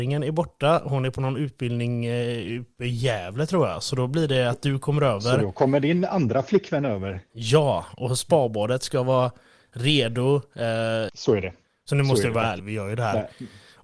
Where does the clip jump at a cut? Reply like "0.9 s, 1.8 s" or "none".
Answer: 11.1 s, 12.6 s